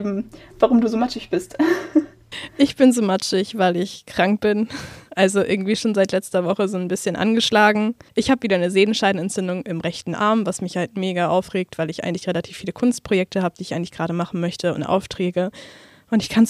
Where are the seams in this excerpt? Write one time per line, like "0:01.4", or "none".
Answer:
none